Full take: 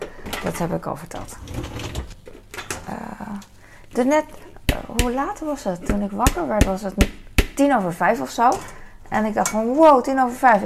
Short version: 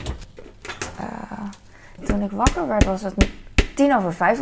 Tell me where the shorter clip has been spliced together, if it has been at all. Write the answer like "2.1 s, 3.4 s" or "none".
2.0 s